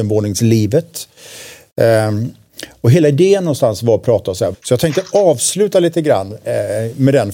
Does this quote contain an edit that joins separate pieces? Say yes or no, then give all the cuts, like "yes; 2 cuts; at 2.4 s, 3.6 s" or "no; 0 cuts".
yes; 1 cut; at 4.5 s